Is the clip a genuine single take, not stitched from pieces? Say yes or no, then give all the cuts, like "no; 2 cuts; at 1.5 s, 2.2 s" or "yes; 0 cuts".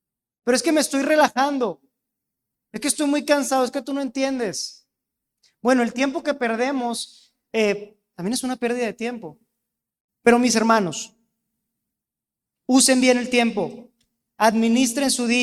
no; 2 cuts; at 8.1 s, 10.1 s